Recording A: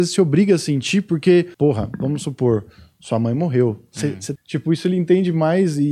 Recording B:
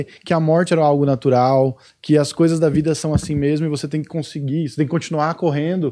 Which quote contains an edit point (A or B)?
A